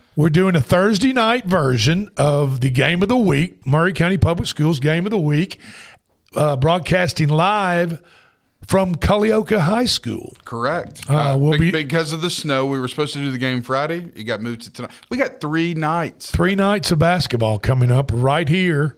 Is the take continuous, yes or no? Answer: yes